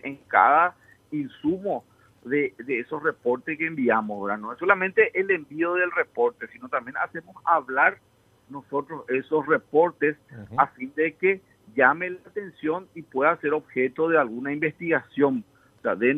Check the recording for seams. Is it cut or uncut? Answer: uncut